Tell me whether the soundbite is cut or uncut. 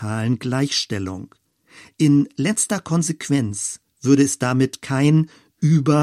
uncut